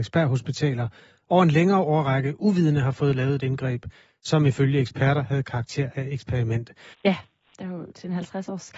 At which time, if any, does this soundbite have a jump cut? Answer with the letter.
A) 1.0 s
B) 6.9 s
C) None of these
B